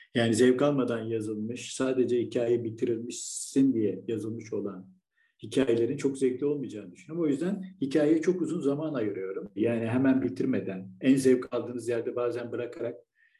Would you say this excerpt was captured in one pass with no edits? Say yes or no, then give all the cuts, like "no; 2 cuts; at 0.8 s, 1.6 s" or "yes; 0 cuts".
no; 1 cut; at 9.6 s